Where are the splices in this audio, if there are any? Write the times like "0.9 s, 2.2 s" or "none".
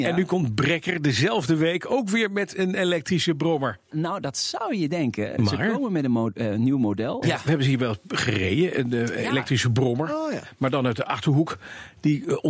7.2 s